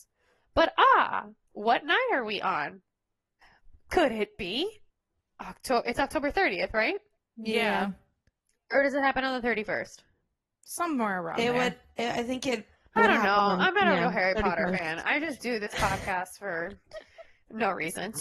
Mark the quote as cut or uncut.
uncut